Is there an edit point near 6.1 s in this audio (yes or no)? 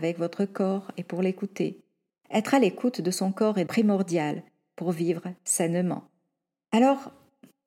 no